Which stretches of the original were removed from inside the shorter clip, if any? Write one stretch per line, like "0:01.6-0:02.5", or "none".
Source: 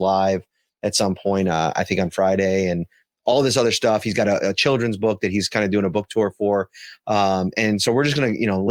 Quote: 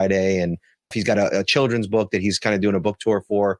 0:03.2-0:04.0